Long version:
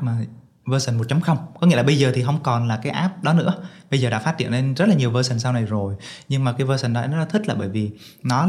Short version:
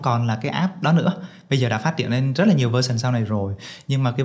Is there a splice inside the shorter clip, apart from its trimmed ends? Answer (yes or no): no